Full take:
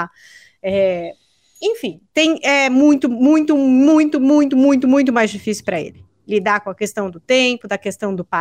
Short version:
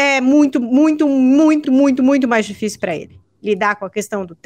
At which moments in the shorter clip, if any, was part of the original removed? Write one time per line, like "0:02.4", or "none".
0:01.6